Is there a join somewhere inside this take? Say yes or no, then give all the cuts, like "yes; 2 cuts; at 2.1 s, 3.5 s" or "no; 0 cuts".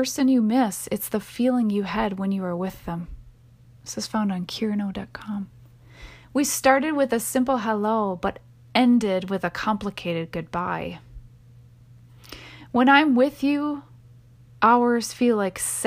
no; 0 cuts